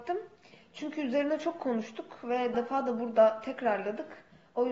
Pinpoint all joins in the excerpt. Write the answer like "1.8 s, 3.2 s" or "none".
2.5 s